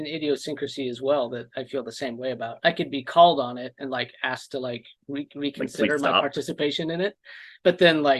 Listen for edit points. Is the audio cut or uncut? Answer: uncut